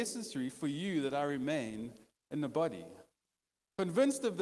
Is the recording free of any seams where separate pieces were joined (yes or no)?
yes